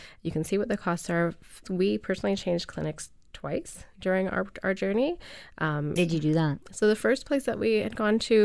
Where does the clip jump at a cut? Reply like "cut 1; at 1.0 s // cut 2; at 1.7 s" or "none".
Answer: cut 1; at 1.6 s // cut 2; at 6.0 s